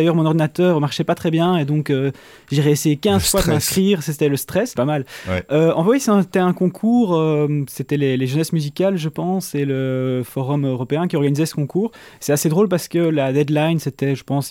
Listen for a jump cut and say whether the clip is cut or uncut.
cut